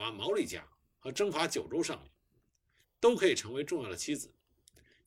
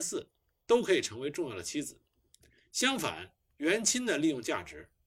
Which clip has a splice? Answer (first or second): first